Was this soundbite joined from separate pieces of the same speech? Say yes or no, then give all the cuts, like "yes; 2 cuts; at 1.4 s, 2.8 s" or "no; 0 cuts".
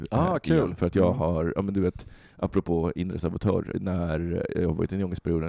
yes; 1 cut; at 3.7 s